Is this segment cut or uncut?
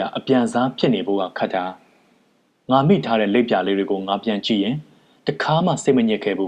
uncut